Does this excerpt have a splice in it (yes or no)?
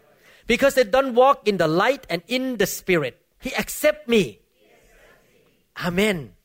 yes